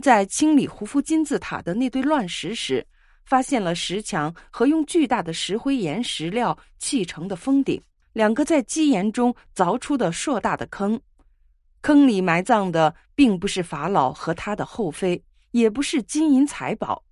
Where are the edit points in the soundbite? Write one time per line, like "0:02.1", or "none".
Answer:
0:08.0